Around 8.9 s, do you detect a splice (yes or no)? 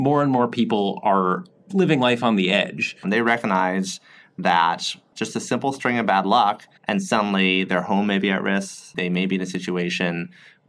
no